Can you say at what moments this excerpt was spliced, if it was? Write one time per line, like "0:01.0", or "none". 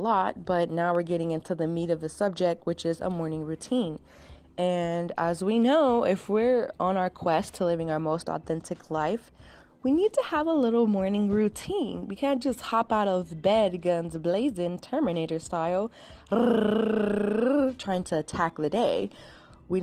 none